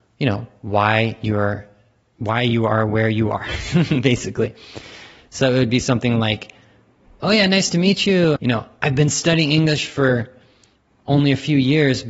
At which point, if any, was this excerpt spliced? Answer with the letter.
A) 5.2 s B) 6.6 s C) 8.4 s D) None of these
C